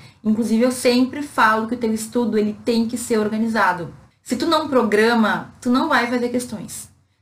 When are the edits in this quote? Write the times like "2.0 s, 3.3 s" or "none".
4.1 s

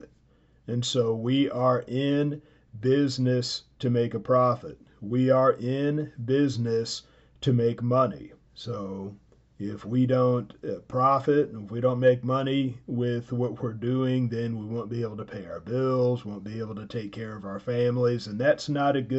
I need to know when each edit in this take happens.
8.4 s

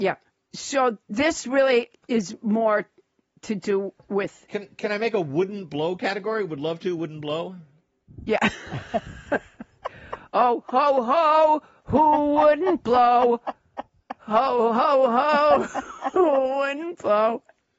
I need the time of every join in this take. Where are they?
none

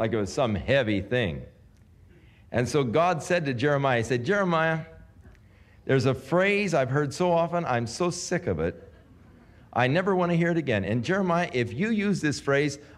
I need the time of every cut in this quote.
none

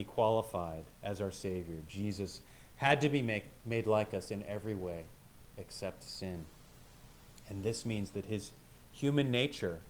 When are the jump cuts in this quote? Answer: none

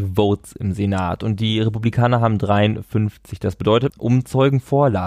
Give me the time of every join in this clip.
3.9 s

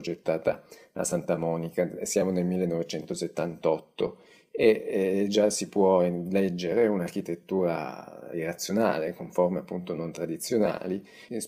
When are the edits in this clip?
none

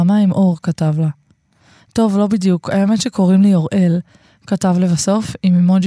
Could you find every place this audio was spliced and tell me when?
none

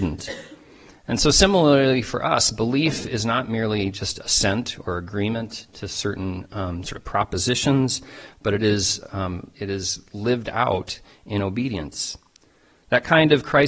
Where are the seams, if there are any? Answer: none

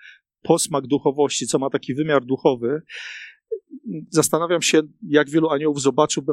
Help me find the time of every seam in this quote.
none

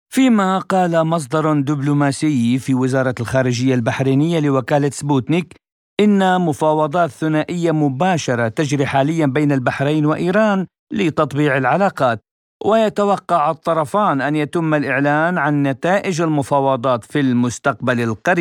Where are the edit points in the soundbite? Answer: none

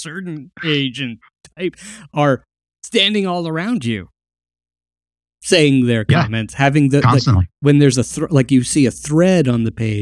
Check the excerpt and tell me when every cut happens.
none

